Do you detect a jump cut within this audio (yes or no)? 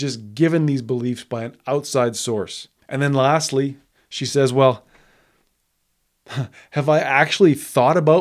no